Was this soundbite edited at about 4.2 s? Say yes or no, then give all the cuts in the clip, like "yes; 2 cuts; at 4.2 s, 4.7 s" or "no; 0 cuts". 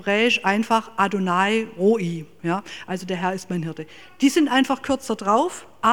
no; 1 cut; at 2.4 s